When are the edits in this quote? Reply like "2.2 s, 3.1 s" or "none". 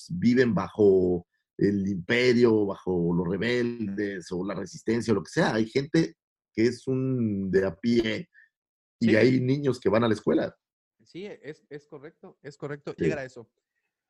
13.0 s